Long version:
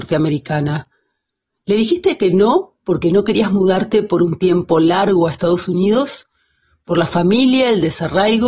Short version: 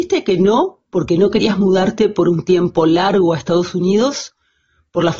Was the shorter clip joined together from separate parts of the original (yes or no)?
no